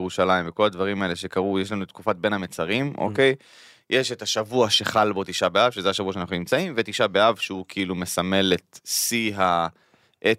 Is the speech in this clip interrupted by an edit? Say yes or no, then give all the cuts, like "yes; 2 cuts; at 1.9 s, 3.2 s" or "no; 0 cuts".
no; 0 cuts